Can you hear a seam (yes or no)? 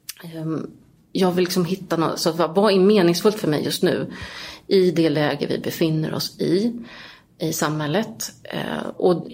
no